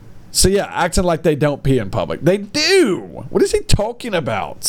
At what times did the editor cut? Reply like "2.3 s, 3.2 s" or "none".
none